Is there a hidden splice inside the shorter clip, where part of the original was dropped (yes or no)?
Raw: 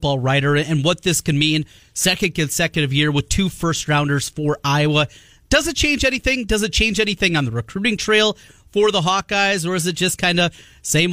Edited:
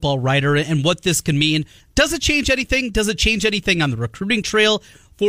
yes